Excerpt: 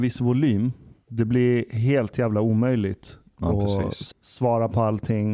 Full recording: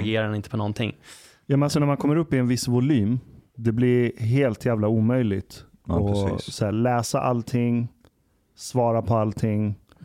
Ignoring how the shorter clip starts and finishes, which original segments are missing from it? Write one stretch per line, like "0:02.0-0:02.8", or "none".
0:06.6-0:08.4